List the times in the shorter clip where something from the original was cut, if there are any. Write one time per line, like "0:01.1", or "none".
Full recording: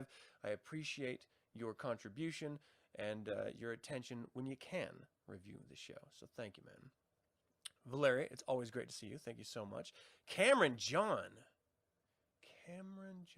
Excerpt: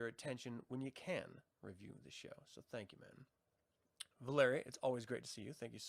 none